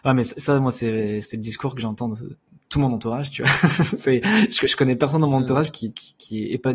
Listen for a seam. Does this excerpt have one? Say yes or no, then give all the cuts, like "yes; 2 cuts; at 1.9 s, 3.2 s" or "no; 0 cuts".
no; 0 cuts